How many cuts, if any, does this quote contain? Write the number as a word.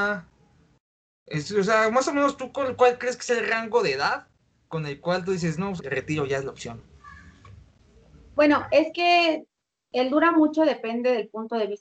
one